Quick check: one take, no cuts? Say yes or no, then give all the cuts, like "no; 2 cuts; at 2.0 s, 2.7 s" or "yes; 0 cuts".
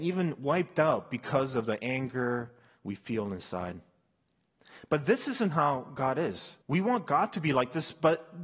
no; 1 cut; at 6.6 s